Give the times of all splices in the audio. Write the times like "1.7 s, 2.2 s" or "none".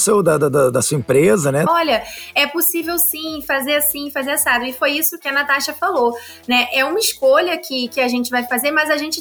1.7 s